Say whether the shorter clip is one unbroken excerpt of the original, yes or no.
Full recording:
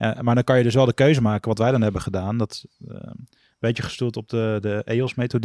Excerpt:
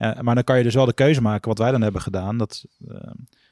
yes